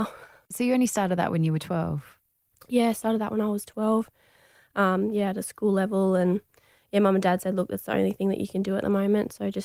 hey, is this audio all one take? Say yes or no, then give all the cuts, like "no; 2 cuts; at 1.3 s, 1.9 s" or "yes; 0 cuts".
yes; 0 cuts